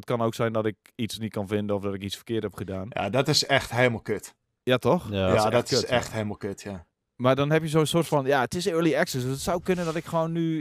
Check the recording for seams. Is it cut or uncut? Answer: uncut